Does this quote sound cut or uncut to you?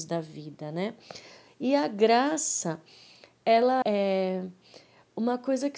cut